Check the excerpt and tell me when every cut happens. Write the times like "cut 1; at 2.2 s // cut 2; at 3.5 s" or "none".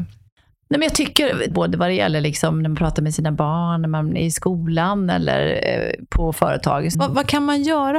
cut 1; at 1.5 s // cut 2; at 6.9 s